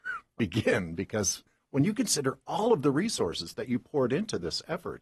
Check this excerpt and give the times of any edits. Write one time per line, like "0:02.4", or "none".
none